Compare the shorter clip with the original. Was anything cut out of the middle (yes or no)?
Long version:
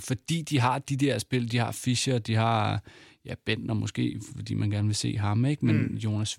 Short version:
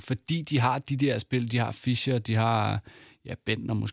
no